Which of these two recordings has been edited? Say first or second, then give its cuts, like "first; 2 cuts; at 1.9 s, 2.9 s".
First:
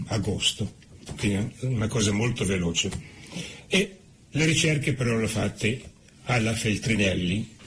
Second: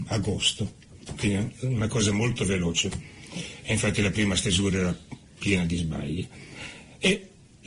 first; 1 cut; at 3.6 s